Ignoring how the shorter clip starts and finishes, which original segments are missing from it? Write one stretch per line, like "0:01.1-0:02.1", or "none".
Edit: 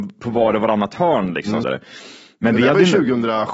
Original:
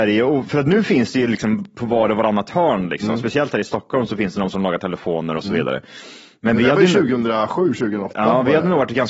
0:03.2-0:05.6